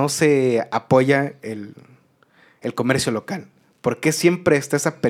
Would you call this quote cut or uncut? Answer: uncut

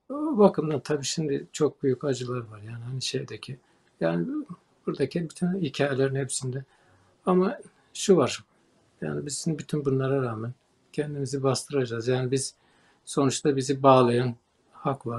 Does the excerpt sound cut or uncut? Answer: uncut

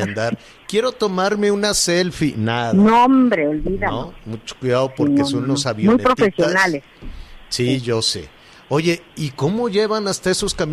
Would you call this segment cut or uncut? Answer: uncut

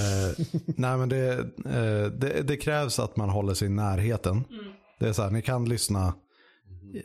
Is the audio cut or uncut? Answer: uncut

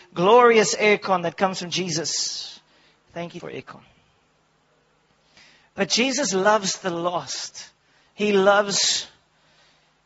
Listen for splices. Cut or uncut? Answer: cut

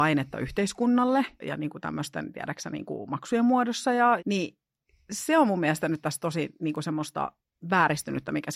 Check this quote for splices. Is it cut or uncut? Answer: cut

